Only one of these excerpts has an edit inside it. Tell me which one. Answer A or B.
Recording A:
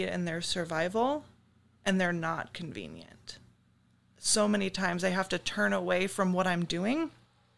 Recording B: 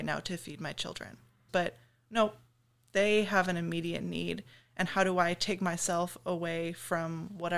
B